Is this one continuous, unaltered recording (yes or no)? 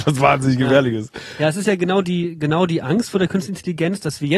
yes